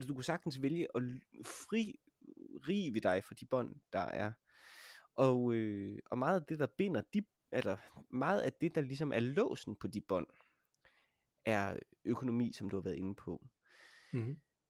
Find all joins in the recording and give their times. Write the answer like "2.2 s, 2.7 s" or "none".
none